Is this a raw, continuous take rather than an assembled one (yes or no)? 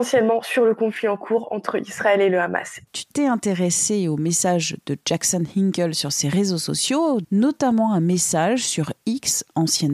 no